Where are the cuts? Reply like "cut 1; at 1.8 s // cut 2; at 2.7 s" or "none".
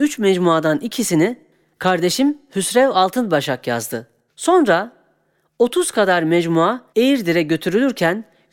cut 1; at 4.3 s // cut 2; at 6.9 s